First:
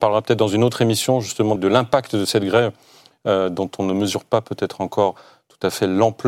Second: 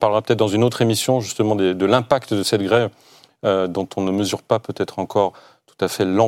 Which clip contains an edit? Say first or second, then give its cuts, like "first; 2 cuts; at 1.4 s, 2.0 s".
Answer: first; 1 cut; at 1.6 s